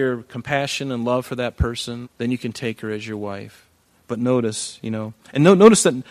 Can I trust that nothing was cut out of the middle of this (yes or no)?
no